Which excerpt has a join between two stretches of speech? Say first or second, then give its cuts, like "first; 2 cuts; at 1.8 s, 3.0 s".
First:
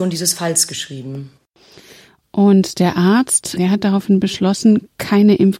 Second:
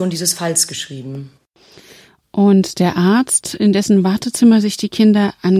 first; 1 cut; at 3.6 s